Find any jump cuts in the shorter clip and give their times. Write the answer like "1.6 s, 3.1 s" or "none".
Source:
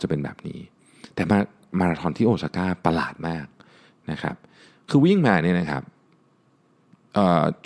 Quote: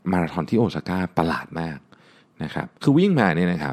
2.7 s